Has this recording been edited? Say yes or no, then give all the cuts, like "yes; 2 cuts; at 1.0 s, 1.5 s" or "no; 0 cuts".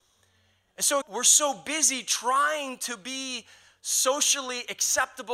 yes; 1 cut; at 1.0 s